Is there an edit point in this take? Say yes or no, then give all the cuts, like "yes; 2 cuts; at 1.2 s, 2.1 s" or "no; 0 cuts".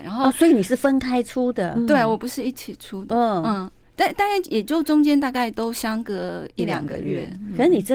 no; 0 cuts